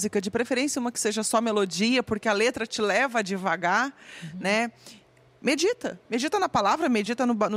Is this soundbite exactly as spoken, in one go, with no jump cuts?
yes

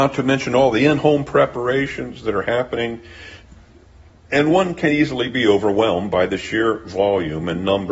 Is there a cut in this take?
no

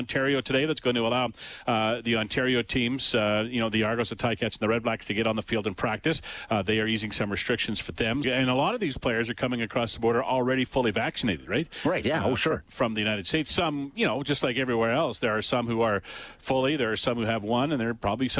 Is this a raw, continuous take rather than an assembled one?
no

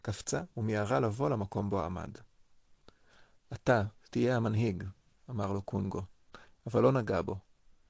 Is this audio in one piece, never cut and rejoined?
yes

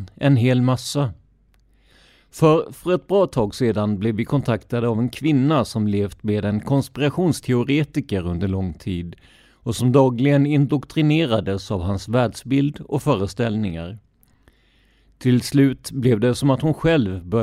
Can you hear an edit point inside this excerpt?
no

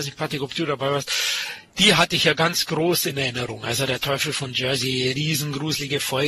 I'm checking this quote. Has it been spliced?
no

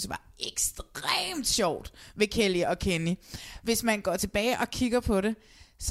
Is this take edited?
no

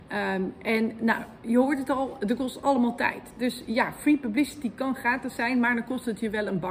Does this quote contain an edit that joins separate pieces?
no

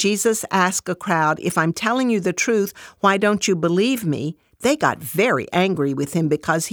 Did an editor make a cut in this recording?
no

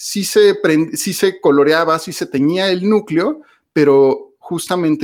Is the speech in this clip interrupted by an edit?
no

